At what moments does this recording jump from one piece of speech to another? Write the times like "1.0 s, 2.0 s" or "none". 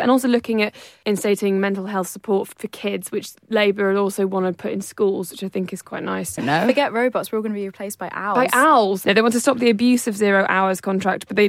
6.4 s